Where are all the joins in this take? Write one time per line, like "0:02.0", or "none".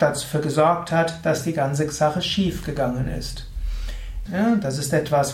0:04.2

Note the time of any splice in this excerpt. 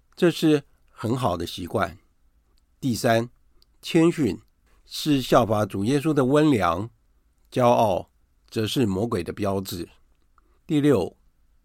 0:10.6

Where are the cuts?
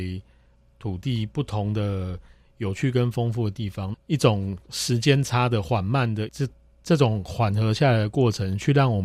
0:03.9
0:06.3

